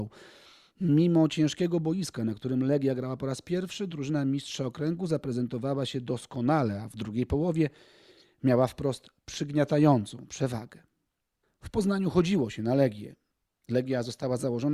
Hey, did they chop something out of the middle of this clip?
yes; 1 cut; at 11.4 s

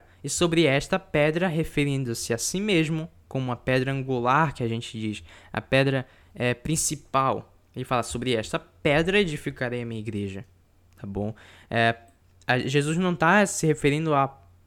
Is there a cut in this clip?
no; 0 cuts

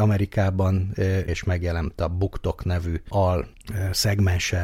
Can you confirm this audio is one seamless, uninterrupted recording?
no; 1 cut; at 1.3 s

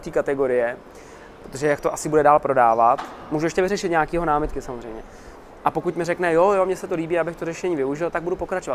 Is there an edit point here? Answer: no; 0 cuts

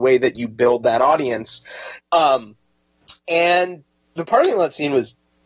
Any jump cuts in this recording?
yes; 2 cuts; at 2.0 s, 3.2 s

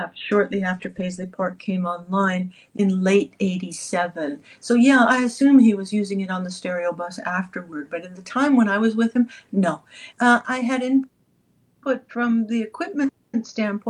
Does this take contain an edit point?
yes; 1 cut; at 10.1 s

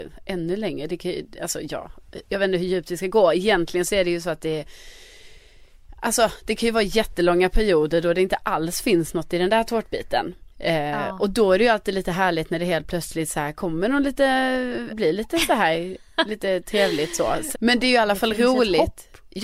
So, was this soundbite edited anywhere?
yes; 2 cuts; at 14.9 s, 17.5 s

